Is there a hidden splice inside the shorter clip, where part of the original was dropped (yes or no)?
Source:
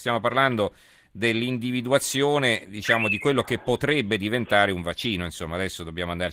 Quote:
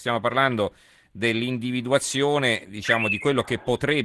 no